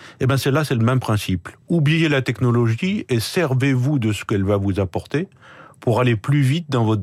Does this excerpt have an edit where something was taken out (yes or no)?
no